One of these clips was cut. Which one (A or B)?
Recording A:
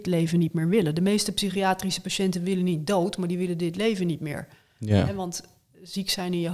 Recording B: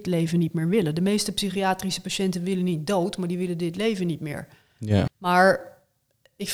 B